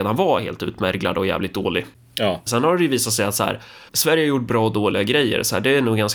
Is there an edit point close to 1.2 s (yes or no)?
no